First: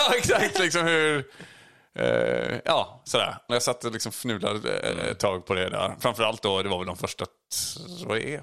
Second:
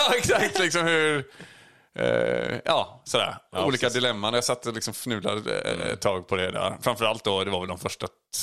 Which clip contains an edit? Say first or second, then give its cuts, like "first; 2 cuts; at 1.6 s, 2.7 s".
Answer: first; 1 cut; at 3.5 s